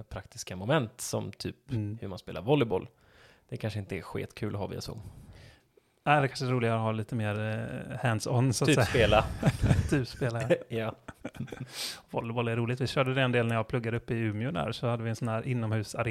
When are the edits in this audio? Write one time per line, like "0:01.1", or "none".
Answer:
none